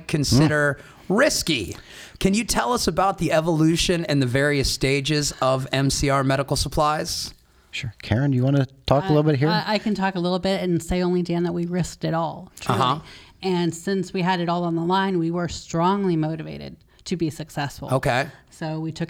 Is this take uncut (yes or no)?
yes